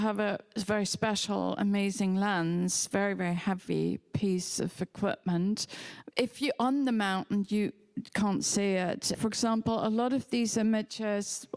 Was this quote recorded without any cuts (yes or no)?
no